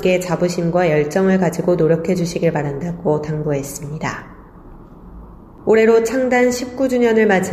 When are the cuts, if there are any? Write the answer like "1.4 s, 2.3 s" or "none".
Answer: none